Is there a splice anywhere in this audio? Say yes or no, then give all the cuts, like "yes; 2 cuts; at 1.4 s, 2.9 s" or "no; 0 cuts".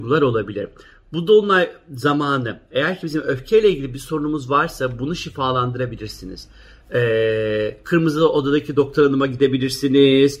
no; 0 cuts